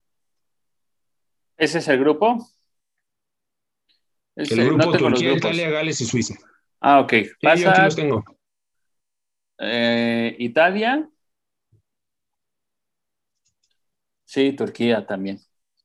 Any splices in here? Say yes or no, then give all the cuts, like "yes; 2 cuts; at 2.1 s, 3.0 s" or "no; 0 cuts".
no; 0 cuts